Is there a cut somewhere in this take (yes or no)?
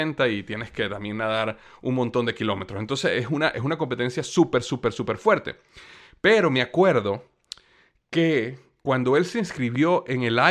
no